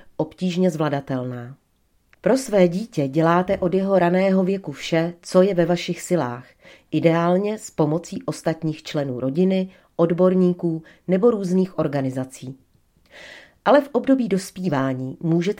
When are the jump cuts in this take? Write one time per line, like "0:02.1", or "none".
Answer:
0:02.1